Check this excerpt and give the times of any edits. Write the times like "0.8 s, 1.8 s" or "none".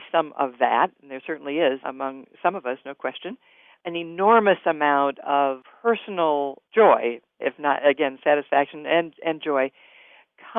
none

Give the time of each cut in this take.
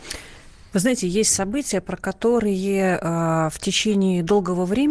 none

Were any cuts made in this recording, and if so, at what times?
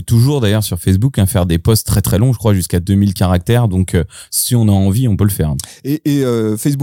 none

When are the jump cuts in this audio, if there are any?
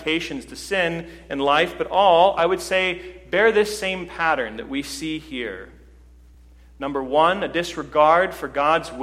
none

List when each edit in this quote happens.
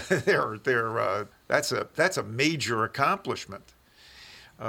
1.3 s

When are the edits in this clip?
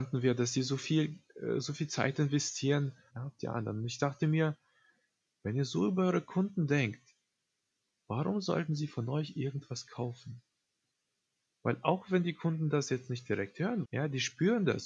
3.1 s, 13.8 s

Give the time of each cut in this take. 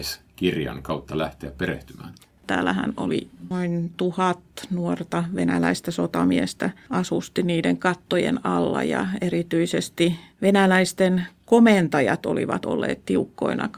2.4 s, 3.5 s, 10.3 s

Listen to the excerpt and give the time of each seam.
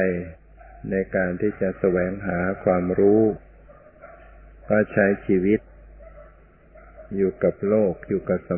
none

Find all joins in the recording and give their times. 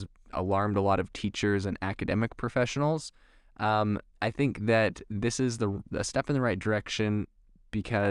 none

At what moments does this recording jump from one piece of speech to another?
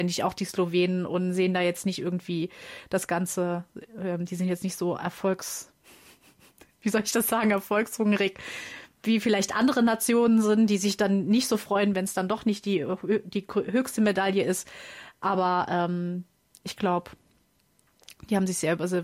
none

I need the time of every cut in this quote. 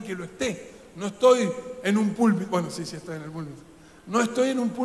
none

